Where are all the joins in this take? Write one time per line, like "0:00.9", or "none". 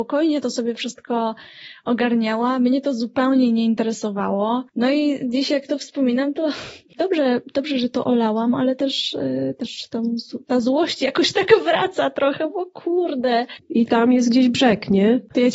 0:13.6